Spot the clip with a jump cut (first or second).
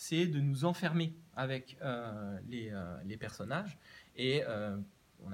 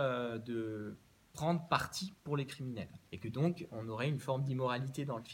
second